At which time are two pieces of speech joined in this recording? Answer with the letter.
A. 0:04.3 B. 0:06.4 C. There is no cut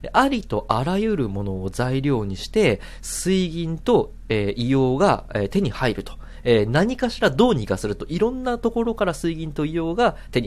C